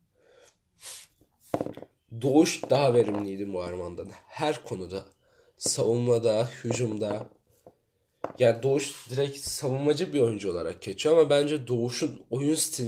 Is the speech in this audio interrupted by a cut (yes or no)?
no